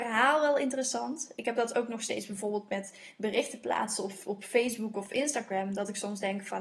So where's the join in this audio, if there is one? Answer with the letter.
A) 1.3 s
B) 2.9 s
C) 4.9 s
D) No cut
D